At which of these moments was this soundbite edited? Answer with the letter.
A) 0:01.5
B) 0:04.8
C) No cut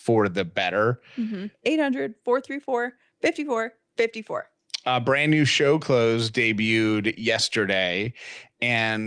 A